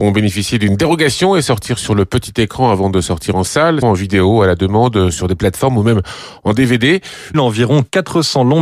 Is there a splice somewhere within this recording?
yes; 2 cuts; at 3.8 s, 7.3 s

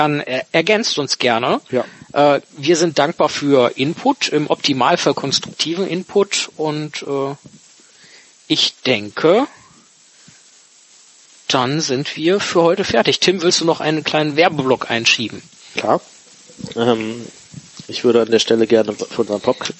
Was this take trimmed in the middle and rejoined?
no; 0 cuts

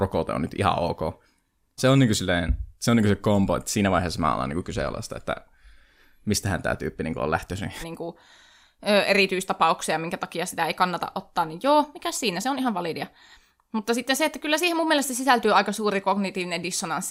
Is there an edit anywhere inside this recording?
yes; 2 cuts; at 1.8 s, 7.8 s

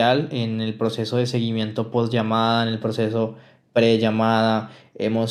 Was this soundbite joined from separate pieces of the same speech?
no; 0 cuts

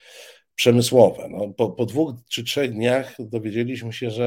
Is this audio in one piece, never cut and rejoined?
yes; 0 cuts

